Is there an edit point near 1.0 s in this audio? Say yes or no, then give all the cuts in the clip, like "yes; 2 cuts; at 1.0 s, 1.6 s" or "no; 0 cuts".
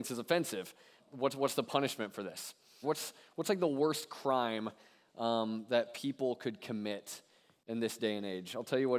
yes; 2 cuts; at 1.0 s, 2.8 s